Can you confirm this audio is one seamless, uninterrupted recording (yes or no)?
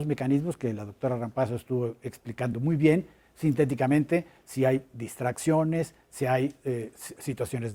yes